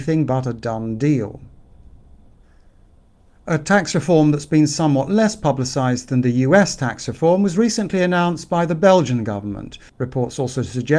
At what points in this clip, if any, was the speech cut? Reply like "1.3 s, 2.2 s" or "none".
9.9 s